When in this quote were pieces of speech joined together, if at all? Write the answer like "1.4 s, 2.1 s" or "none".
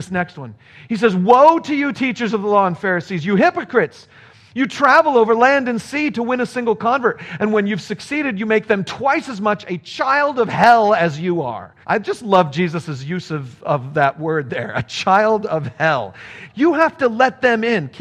11.8 s, 16.5 s